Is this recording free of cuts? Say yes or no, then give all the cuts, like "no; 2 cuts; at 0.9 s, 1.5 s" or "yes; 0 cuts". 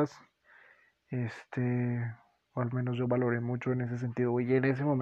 no; 1 cut; at 2.5 s